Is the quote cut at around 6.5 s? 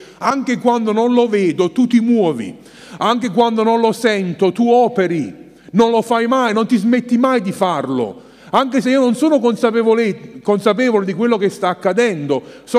no; 0 cuts

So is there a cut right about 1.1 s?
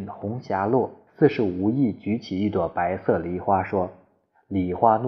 yes; 1 cut; at 1.1 s

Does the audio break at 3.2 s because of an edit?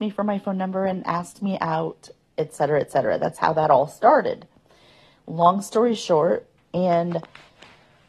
no; 1 cut; at 6.6 s

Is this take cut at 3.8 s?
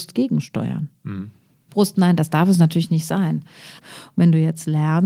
yes; 2 cuts; at 1.7 s, 3.8 s

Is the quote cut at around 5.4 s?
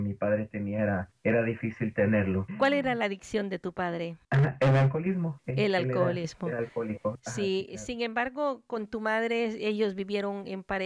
no; 0 cuts

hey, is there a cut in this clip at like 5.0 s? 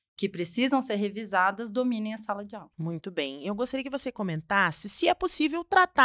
no; 1 cut; at 2.7 s

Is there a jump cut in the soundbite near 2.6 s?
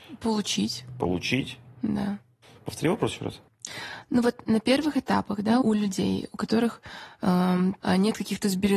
no; 2 cuts; at 5.6 s, 7.8 s

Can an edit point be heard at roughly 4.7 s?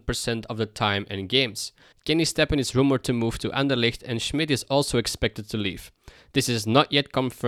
no; 1 cut; at 1.9 s

